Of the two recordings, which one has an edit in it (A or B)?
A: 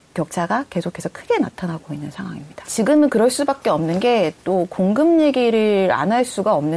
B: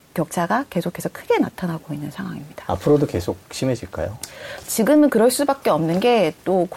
A